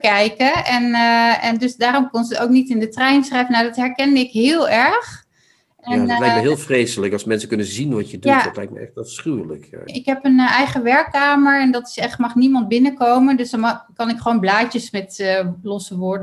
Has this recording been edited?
yes; 1 cut; at 9.9 s

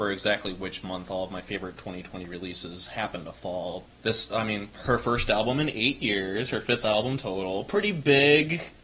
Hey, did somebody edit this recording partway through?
yes; 1 cut; at 3.9 s

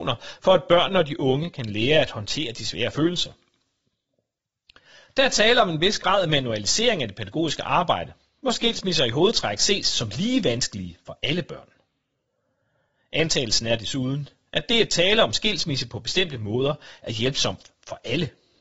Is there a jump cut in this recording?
no; 0 cuts

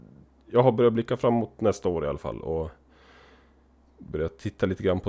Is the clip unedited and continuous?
yes; 0 cuts

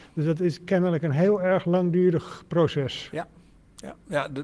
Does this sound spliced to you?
no; 0 cuts

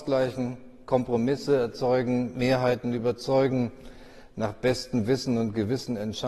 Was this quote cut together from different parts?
no; 0 cuts

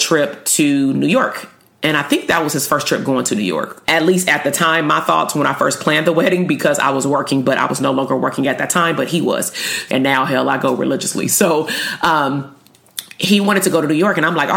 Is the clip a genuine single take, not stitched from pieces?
no; 2 cuts; at 3.8 s, 9.9 s

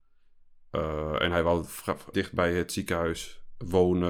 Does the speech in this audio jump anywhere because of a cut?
yes; 1 cut; at 2.1 s

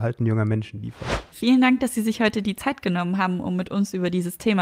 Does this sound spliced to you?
yes; 1 cut; at 1.3 s

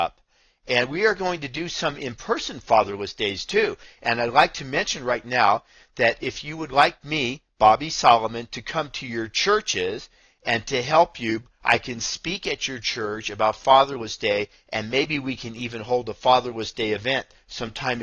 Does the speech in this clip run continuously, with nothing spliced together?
yes; 0 cuts

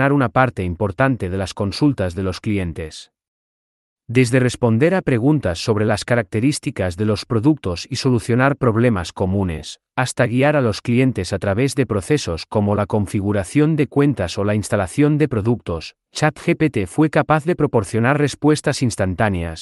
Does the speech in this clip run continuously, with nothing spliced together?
yes; 0 cuts

